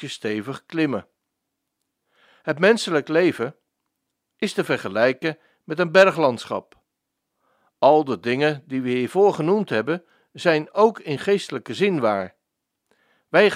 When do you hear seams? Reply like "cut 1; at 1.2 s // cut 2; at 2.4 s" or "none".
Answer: cut 1; at 4.3 s